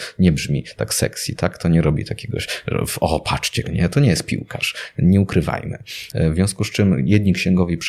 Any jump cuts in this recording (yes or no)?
yes